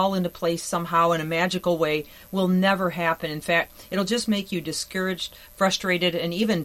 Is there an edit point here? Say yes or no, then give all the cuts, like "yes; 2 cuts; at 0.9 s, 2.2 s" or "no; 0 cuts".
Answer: no; 0 cuts